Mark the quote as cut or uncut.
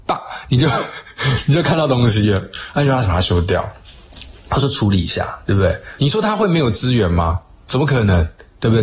cut